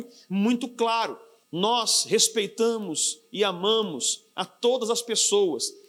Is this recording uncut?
no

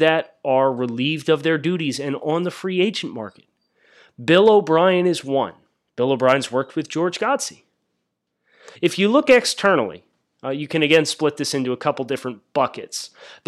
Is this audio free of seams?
no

